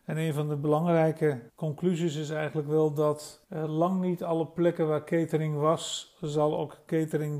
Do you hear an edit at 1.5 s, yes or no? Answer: yes